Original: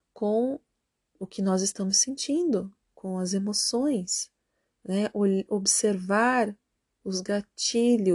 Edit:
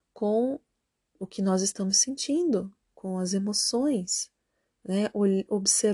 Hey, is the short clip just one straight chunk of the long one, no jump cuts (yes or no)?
yes